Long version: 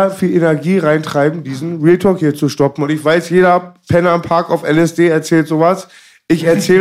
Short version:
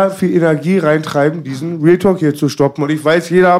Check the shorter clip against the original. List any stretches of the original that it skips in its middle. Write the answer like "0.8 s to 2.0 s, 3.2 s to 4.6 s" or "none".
none